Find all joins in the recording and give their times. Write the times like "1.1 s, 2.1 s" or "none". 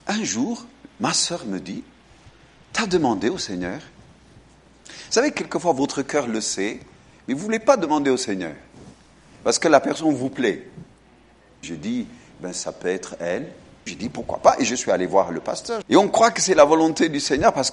11.6 s, 13.9 s, 15.8 s